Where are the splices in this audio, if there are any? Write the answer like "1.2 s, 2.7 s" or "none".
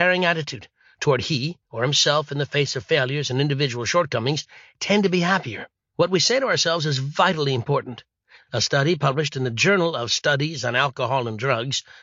5.9 s, 8.4 s